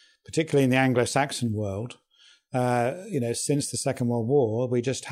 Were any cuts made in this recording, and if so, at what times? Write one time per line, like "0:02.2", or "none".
none